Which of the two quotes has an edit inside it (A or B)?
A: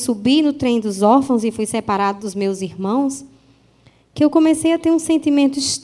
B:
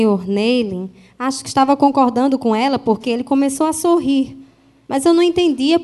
B